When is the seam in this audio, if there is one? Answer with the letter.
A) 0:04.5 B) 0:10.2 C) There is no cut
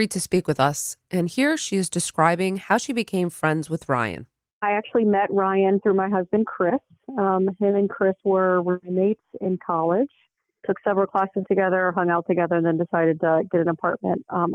C